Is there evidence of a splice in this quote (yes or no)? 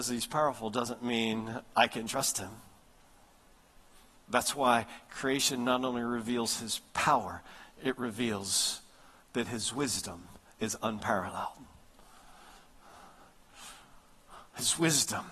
yes